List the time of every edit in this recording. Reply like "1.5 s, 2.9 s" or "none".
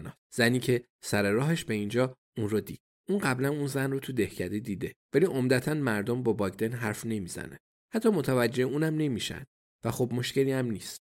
5.0 s